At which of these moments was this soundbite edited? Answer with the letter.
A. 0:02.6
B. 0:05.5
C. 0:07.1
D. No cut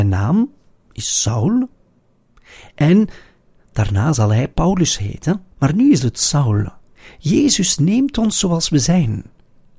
B